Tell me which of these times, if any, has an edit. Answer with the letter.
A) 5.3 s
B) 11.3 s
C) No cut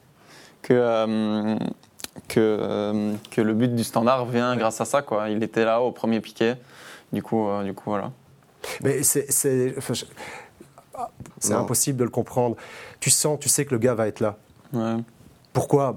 B